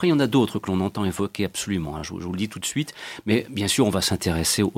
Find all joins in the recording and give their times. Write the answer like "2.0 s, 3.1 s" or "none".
none